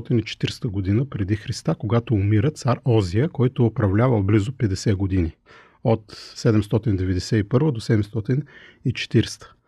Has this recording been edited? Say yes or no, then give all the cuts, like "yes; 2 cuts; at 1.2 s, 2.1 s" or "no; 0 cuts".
no; 0 cuts